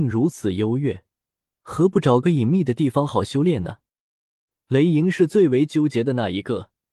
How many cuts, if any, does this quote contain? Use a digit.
1